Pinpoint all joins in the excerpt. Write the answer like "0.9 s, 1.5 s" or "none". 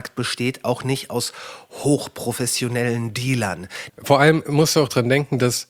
3.9 s